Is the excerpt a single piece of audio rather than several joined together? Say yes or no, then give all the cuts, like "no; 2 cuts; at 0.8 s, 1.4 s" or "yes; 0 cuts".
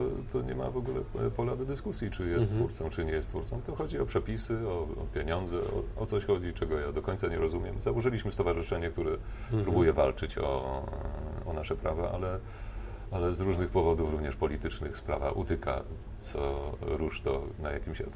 yes; 0 cuts